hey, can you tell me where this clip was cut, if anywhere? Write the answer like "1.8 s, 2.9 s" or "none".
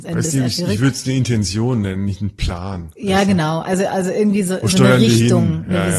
none